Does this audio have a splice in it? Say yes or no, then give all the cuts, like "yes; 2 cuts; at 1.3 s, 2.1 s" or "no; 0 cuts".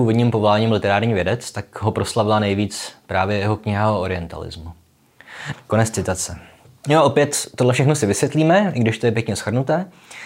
yes; 1 cut; at 5.5 s